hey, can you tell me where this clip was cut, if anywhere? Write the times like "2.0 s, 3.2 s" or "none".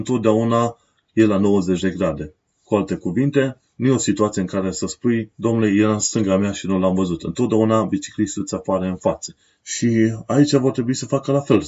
9.6 s